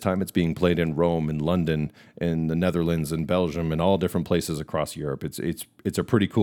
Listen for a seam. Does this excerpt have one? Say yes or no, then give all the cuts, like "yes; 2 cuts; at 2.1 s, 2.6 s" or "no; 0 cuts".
no; 0 cuts